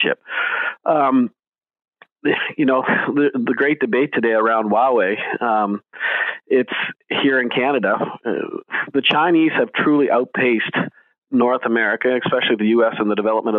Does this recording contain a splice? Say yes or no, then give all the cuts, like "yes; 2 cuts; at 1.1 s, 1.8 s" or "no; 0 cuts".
no; 0 cuts